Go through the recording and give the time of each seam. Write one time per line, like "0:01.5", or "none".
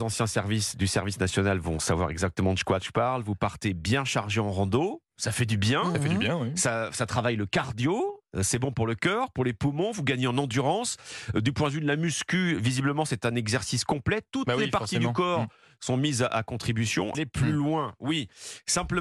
0:17.1